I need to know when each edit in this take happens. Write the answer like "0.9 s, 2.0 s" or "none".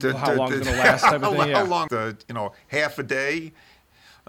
1.9 s